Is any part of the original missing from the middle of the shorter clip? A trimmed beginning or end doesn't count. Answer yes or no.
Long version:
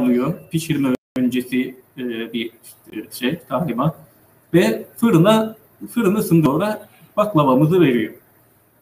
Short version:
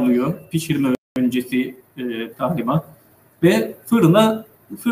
yes